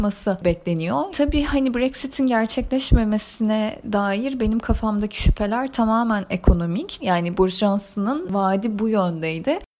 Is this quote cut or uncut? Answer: cut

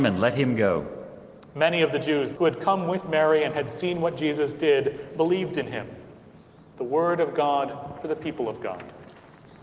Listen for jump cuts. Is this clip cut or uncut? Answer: cut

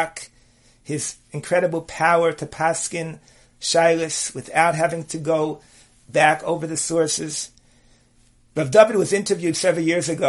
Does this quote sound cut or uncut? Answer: cut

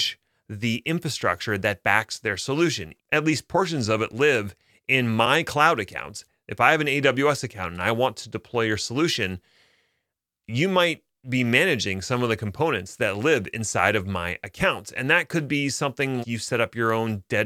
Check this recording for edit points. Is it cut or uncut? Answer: cut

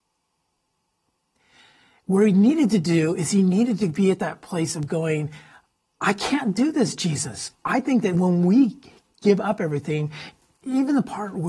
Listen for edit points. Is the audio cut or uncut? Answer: cut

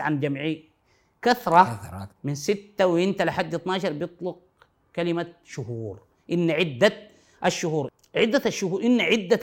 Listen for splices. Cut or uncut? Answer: uncut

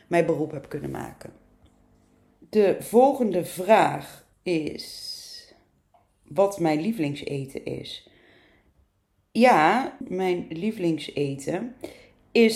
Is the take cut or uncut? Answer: uncut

